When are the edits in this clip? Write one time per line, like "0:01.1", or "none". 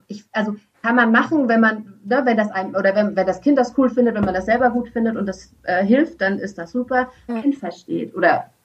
0:07.3